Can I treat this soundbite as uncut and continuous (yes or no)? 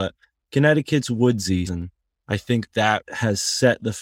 no